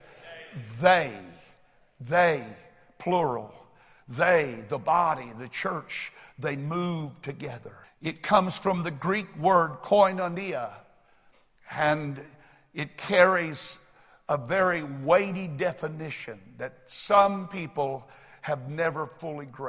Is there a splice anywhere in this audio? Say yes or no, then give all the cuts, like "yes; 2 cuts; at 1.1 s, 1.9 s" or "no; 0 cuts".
yes; 1 cut; at 7.8 s